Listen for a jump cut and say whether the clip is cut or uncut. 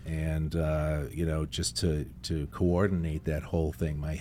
uncut